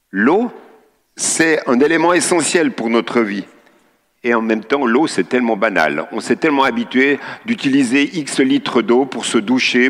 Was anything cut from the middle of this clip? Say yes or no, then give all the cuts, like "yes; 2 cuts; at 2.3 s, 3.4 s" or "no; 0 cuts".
no; 0 cuts